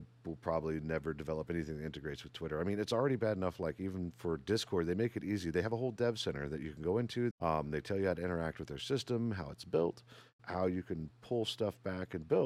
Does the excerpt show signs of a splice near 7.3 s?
yes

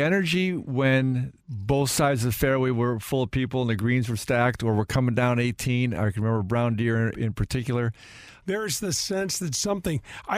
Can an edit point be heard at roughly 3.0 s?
no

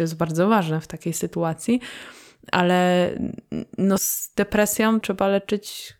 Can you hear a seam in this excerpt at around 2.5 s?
no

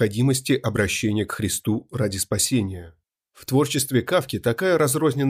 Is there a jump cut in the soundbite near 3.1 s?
no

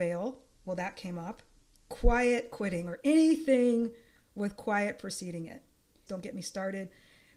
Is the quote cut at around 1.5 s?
no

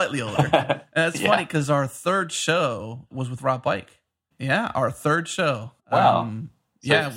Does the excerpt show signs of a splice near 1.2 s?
no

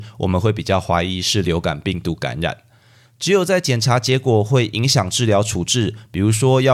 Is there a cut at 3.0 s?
yes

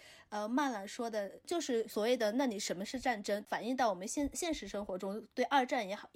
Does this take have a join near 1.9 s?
yes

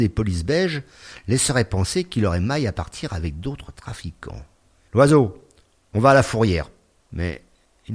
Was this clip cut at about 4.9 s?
yes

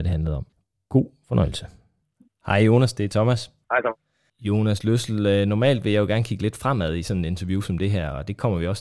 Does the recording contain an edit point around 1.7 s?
no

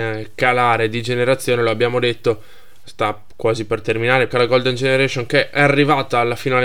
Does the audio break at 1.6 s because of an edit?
no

